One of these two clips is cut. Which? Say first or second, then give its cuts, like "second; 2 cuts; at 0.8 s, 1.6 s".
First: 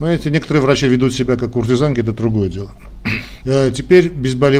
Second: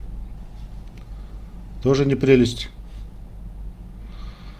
first; 1 cut; at 3.4 s